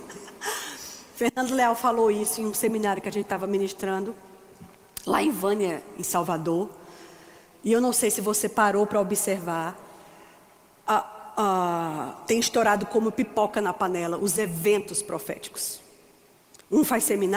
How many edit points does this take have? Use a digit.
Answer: 0